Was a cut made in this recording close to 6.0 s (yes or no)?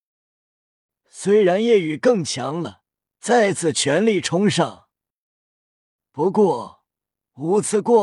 yes